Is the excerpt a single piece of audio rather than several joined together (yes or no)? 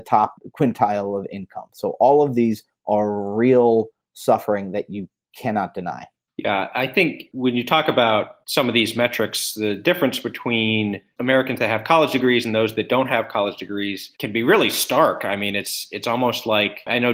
yes